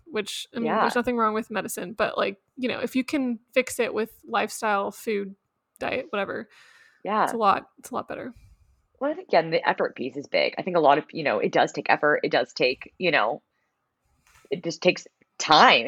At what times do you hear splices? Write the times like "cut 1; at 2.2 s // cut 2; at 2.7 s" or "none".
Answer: none